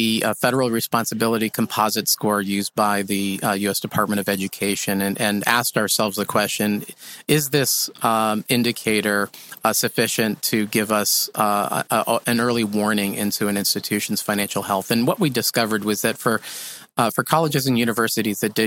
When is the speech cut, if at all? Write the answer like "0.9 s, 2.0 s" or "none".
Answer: none